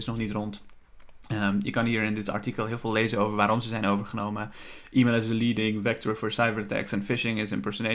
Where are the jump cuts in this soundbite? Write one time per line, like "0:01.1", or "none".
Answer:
none